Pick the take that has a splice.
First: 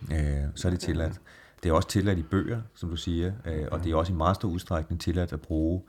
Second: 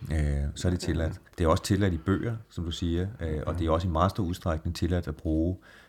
second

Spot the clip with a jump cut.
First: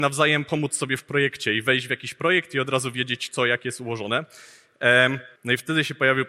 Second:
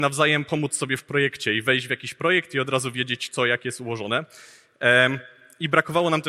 first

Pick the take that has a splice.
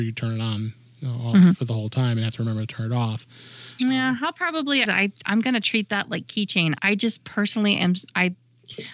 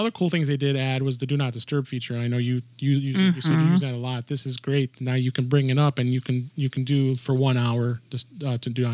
first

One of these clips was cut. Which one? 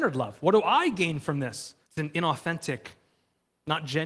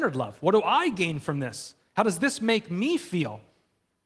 first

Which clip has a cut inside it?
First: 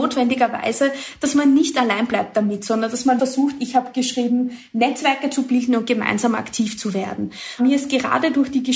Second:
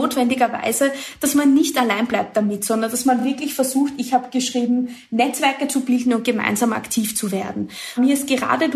first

